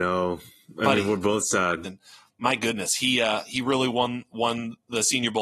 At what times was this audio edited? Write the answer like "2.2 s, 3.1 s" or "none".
1.8 s

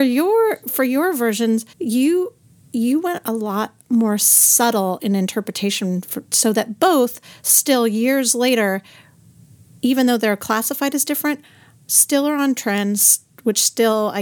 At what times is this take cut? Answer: 1.7 s

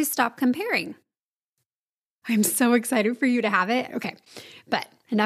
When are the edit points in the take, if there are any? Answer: 2.2 s, 3.9 s

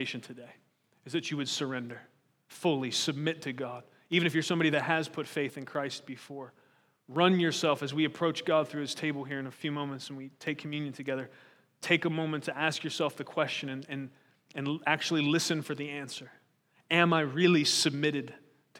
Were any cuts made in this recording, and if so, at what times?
none

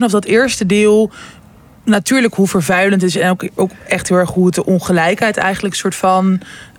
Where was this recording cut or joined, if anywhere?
none

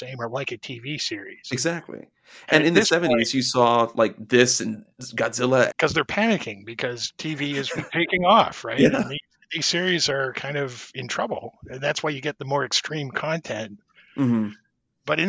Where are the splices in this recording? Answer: 5.7 s, 7.8 s

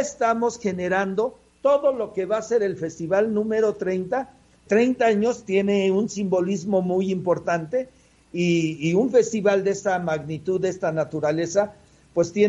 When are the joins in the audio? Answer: 4.7 s

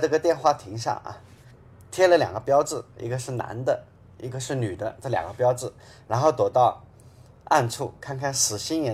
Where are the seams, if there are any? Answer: none

